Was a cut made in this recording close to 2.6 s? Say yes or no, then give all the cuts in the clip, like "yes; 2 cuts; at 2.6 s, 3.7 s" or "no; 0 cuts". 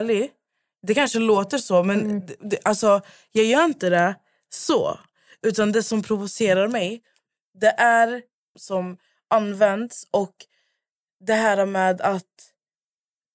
no; 1 cut; at 8.5 s